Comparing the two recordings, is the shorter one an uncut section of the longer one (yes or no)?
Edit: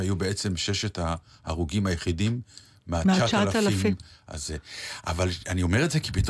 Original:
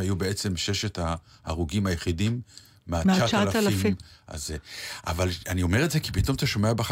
yes